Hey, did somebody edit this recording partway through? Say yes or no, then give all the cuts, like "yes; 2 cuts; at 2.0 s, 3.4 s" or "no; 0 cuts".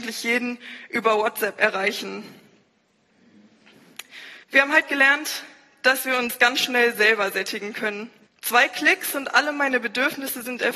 yes; 2 cuts; at 4.4 s, 8.3 s